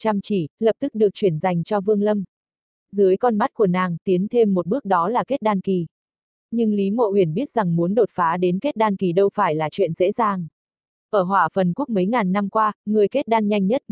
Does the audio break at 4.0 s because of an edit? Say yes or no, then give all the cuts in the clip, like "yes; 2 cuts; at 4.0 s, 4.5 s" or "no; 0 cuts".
yes; 1 cut; at 4.0 s